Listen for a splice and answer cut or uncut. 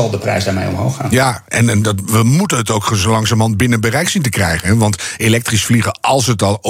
uncut